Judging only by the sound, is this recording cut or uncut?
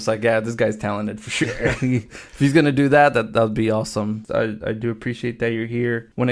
cut